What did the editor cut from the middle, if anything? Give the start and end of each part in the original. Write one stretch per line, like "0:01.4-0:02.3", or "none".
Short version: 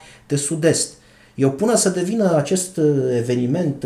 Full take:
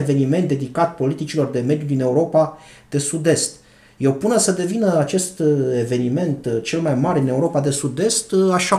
none